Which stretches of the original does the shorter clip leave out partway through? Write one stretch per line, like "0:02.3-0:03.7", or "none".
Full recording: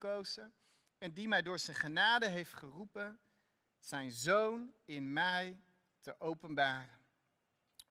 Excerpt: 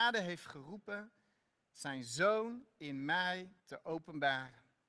0:05.7-0:06.0

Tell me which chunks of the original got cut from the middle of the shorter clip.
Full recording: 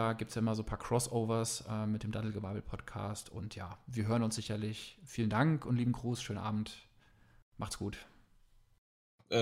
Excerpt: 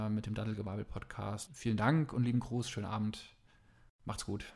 0:03.2-0:05.0

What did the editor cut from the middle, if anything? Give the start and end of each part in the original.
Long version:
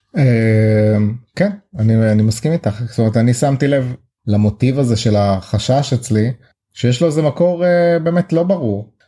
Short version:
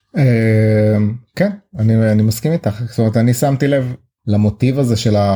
none

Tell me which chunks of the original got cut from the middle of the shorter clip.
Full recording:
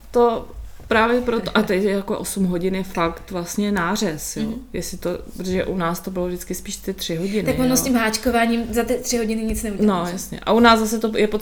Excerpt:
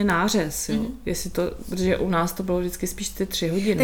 none

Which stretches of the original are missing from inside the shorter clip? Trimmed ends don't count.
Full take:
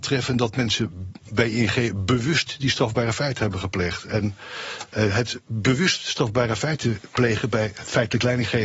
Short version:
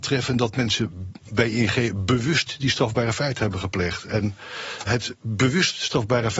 0:04.9-0:05.1

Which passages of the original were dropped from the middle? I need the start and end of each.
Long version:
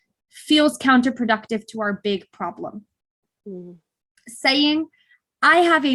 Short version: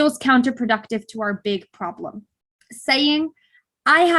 0:03.1-0:04.1

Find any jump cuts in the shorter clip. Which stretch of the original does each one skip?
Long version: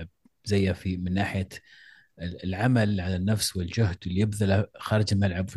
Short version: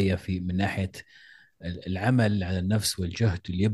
none

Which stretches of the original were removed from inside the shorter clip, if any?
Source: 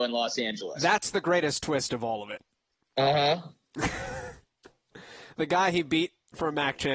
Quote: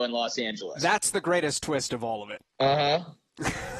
0:02.5-0:02.9

